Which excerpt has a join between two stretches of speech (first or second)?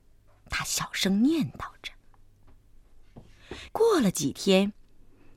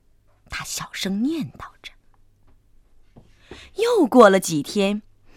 first